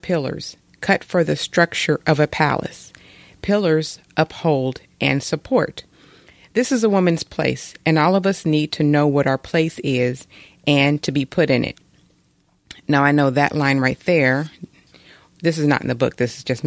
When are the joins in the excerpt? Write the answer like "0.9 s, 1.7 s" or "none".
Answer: none